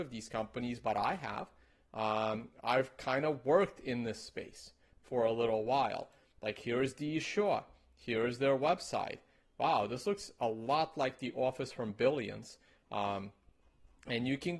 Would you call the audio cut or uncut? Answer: uncut